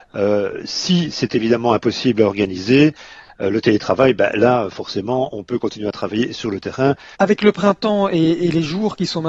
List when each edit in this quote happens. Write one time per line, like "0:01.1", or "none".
0:07.1